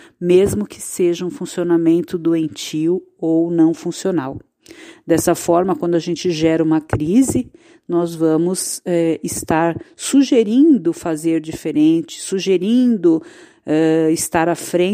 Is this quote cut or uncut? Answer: uncut